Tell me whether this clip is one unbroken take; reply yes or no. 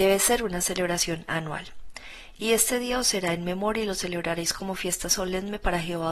yes